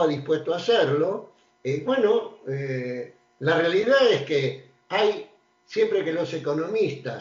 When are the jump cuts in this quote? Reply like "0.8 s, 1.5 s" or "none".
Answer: none